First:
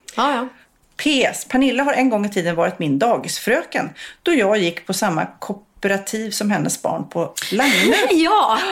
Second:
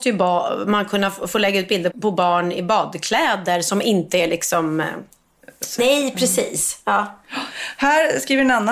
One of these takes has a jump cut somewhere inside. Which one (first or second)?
second